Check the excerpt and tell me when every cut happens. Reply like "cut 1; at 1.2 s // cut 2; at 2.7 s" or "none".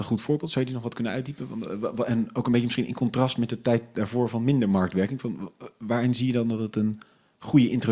none

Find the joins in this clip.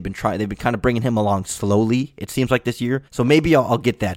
cut 1; at 3.1 s

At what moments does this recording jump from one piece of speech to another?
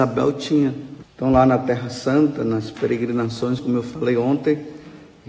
cut 1; at 1.0 s // cut 2; at 3.6 s

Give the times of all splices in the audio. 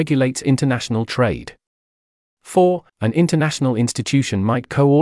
cut 1; at 2.9 s

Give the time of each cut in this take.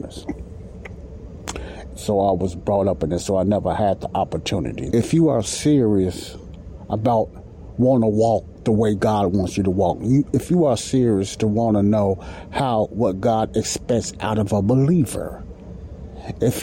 cut 1; at 1.9 s // cut 2; at 4.9 s

